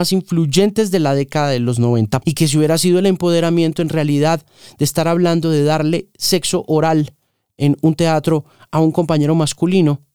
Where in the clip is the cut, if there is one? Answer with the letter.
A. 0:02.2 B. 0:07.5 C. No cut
A